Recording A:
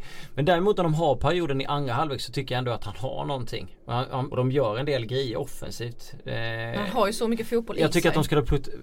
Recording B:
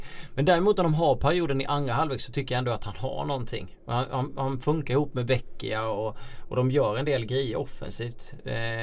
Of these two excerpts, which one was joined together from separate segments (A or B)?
A